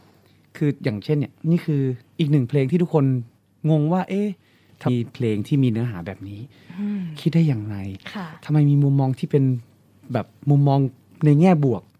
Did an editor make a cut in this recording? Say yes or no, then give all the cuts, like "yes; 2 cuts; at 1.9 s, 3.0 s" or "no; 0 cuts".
yes; 1 cut; at 4.9 s